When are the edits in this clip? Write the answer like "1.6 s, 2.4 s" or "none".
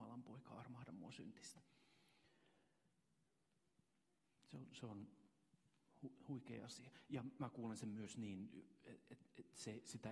none